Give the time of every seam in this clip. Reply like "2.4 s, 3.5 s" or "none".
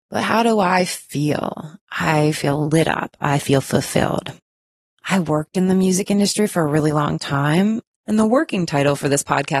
4.9 s, 8.0 s